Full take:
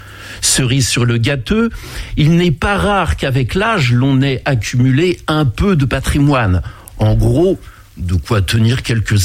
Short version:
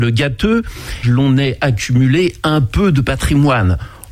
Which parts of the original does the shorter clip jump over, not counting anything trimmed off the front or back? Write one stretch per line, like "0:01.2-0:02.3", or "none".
0:02.1-0:03.9